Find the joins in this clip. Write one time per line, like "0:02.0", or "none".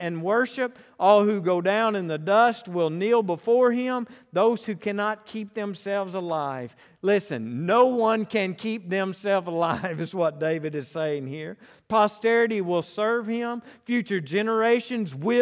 none